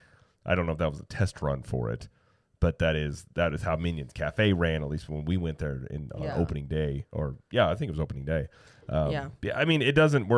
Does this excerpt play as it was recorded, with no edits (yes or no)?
yes